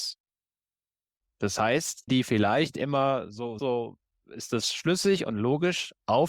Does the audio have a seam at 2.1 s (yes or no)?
yes